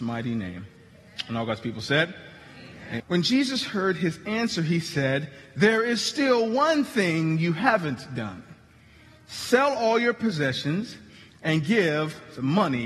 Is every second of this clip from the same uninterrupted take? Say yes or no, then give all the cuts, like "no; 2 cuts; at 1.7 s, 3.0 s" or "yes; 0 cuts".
no; 1 cut; at 3.0 s